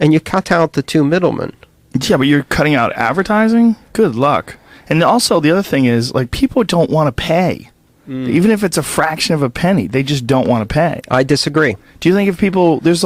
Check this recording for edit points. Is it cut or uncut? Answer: uncut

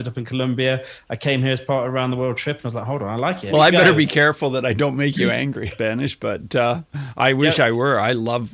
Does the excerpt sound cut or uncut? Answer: cut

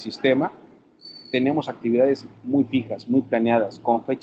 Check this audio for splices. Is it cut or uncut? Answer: uncut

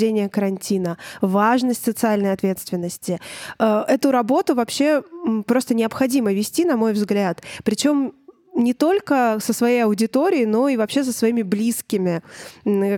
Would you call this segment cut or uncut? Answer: uncut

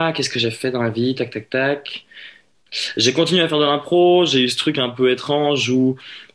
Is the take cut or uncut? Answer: uncut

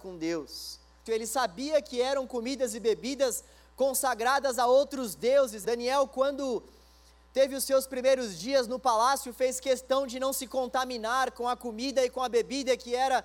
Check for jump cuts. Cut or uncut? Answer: cut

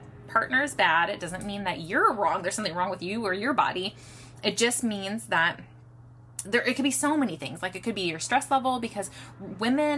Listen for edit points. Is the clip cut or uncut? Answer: cut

